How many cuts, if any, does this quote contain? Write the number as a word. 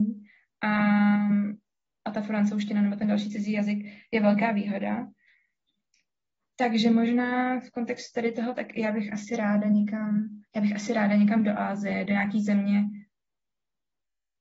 zero